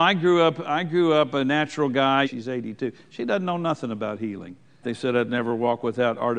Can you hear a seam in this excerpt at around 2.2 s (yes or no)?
yes